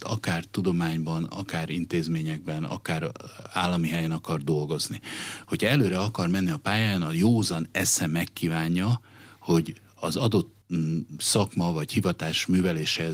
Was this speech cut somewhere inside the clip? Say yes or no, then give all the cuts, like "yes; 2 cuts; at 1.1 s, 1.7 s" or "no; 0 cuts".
yes; 1 cut; at 1.3 s